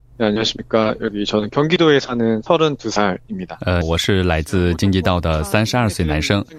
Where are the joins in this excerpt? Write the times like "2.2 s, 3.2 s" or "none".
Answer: 3.8 s